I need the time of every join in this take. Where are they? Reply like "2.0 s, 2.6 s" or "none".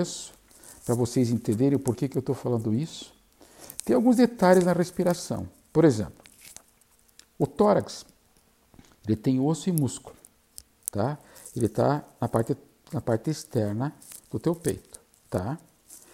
none